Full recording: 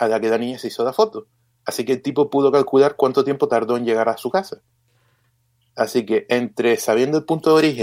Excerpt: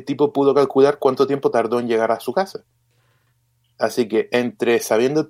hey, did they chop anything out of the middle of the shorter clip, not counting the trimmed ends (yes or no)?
no